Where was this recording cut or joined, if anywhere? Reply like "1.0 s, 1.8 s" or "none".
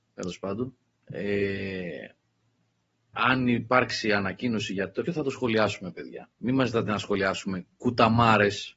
5.1 s, 6.3 s